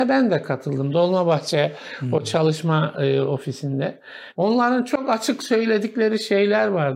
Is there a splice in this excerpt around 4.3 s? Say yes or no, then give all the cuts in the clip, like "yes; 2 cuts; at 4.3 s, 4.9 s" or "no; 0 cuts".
yes; 1 cut; at 4.3 s